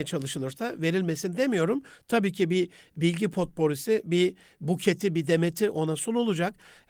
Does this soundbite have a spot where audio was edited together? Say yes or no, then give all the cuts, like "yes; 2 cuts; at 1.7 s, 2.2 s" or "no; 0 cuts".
no; 0 cuts